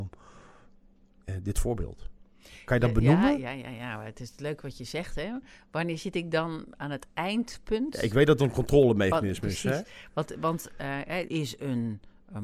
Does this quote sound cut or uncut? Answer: cut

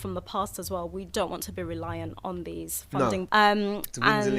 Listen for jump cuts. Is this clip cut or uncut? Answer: cut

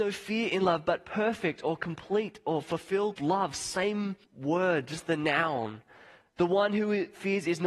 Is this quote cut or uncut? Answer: cut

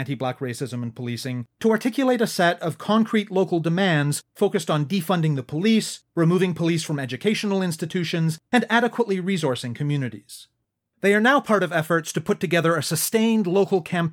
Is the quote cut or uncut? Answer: uncut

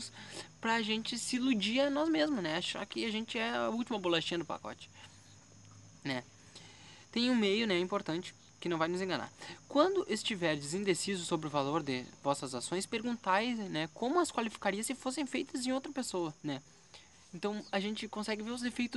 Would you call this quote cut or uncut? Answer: cut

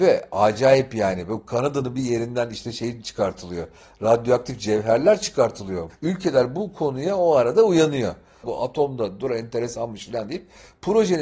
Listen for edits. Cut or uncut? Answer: cut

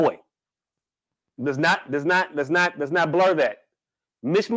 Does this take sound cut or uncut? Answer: uncut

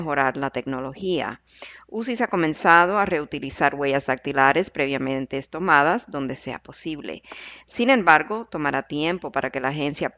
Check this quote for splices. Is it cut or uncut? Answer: uncut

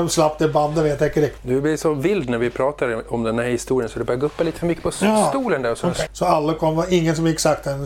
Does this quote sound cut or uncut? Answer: cut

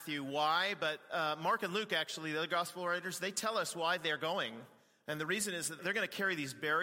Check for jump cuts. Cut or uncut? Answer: cut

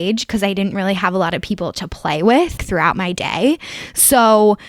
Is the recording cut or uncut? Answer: cut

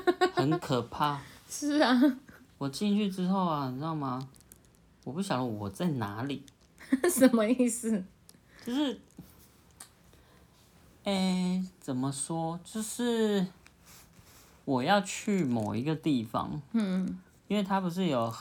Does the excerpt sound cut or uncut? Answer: uncut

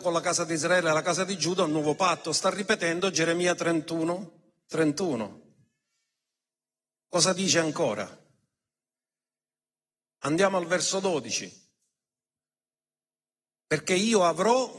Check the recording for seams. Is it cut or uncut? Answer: uncut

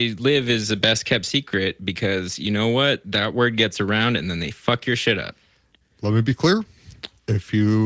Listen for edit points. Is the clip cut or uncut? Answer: uncut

